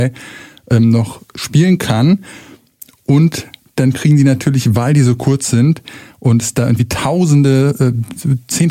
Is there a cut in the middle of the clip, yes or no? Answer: no